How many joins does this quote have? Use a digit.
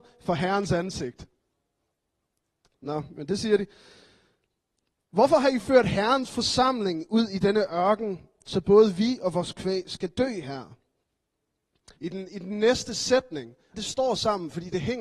3